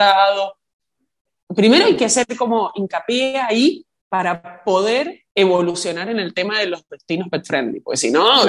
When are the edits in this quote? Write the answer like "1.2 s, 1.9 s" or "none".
5.3 s